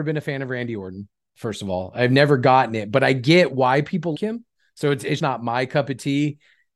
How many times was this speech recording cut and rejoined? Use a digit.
2